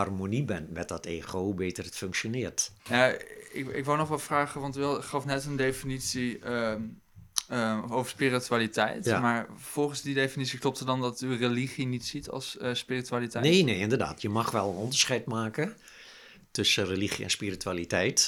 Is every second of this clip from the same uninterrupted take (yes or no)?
yes